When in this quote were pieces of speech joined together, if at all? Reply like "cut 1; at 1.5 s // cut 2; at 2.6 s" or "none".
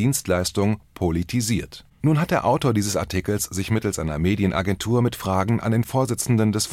cut 1; at 1.9 s